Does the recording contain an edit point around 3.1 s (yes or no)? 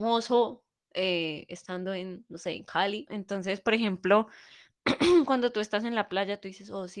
yes